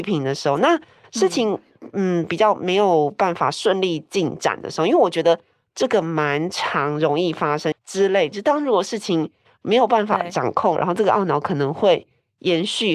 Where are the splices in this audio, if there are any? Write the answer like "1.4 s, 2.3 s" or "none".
7.7 s, 10.8 s